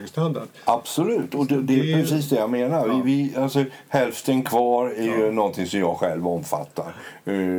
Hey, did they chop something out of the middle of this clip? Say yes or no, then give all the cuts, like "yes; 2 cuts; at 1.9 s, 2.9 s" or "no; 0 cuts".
no; 0 cuts